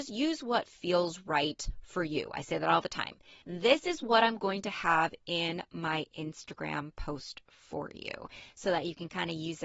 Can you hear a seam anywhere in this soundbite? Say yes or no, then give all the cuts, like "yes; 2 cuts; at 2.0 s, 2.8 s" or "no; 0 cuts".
yes; 1 cut; at 3.4 s